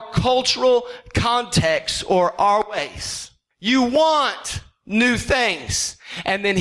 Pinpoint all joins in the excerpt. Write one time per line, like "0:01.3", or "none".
0:03.5